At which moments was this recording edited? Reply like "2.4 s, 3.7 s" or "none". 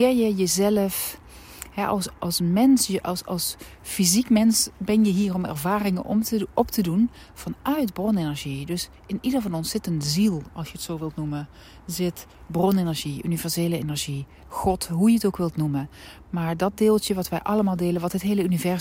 none